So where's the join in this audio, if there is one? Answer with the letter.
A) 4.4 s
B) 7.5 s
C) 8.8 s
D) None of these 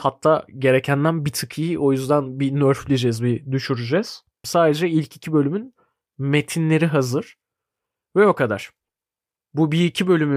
A